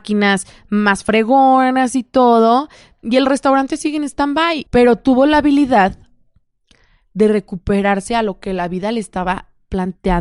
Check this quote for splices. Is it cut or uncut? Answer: cut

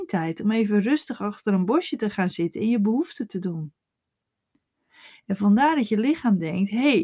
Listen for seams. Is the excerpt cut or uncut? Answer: uncut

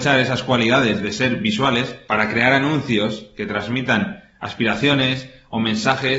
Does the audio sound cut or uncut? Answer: uncut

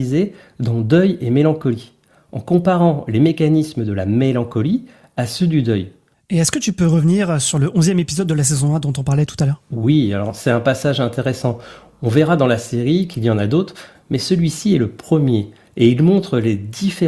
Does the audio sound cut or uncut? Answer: cut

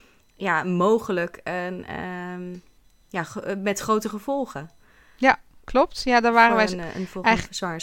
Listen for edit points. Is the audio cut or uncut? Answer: uncut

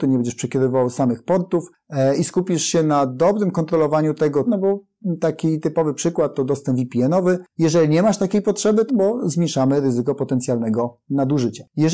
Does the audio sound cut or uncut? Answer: cut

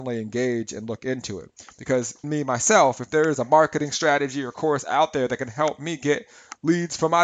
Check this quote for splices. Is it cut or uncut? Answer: cut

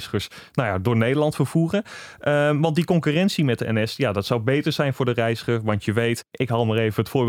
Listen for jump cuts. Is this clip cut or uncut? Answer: uncut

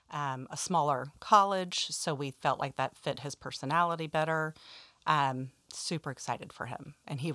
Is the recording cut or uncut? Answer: uncut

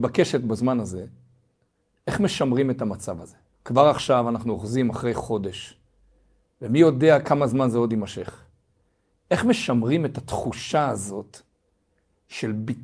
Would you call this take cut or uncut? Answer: cut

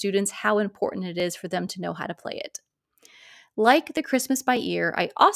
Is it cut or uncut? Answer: uncut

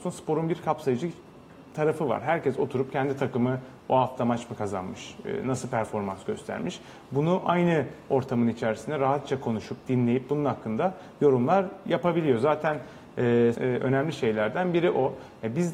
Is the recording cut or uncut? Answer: cut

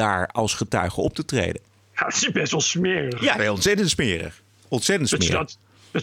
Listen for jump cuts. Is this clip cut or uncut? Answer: uncut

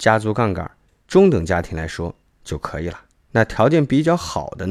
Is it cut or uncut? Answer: cut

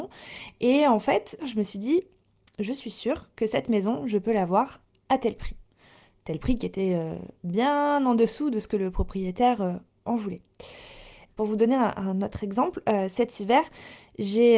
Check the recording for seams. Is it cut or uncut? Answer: cut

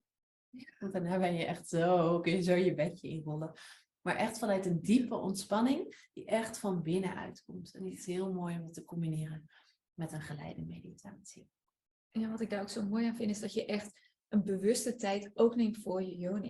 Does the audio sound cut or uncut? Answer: uncut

